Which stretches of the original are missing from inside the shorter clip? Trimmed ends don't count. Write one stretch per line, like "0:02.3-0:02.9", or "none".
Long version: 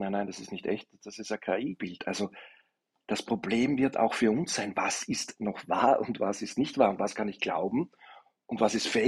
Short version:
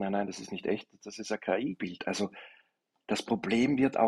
none